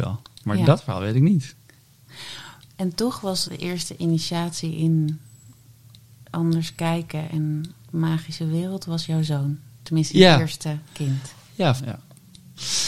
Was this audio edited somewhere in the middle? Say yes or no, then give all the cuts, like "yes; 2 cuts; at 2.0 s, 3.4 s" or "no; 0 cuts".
yes; 2 cuts; at 3.5 s, 11.8 s